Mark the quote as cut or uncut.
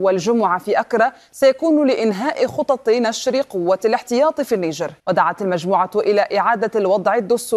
cut